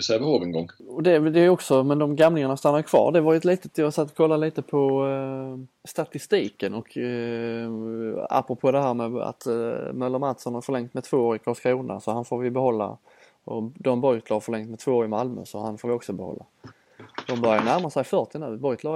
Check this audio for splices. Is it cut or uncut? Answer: uncut